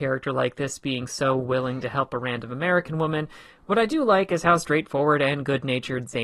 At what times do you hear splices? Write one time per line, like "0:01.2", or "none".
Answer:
none